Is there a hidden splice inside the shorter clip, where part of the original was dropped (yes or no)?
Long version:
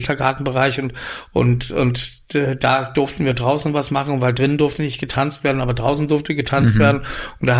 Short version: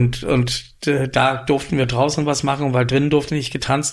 no